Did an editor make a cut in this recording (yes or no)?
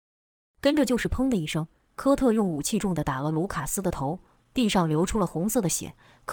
yes